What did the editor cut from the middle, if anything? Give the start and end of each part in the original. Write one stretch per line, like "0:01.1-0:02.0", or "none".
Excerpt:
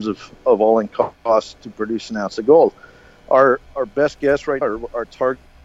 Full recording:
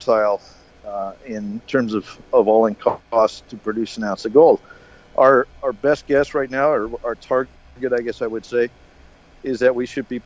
0:06.5-0:06.7